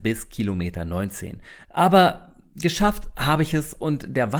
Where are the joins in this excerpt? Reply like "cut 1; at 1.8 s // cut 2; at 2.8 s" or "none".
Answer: cut 1; at 1.7 s

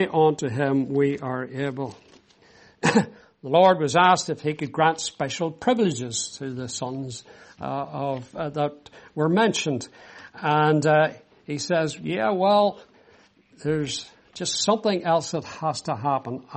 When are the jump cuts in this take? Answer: none

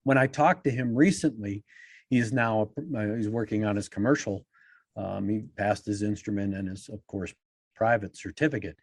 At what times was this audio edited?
none

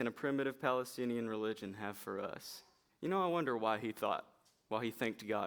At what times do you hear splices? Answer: cut 1; at 2.9 s

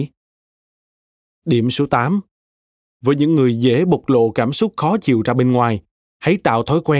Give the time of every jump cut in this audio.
cut 1; at 2.9 s

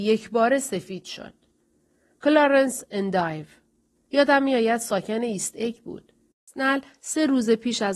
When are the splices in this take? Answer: cut 1; at 6.3 s

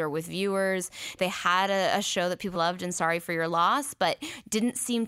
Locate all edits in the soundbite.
cut 1; at 1.2 s // cut 2; at 2.5 s

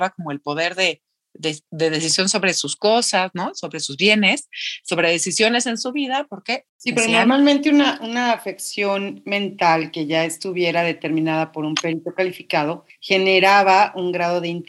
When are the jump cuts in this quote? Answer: none

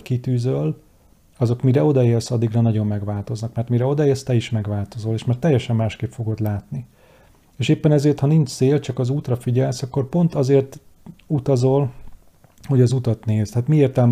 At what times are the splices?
none

